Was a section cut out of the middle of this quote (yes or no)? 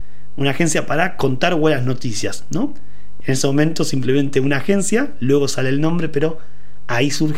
yes